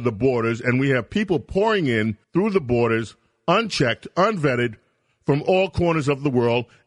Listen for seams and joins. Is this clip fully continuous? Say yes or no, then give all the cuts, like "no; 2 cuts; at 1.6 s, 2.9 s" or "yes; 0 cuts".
no; 1 cut; at 2.2 s